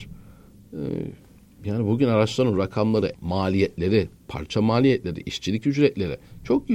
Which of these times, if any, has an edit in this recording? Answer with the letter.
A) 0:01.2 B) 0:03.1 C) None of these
B